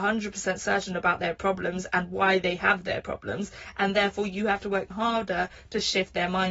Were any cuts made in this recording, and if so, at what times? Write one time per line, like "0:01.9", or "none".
0:04.9